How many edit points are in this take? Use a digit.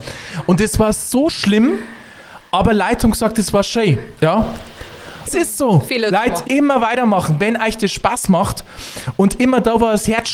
3